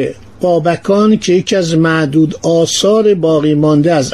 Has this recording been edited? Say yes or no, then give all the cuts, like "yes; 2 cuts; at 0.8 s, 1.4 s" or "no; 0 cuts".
no; 0 cuts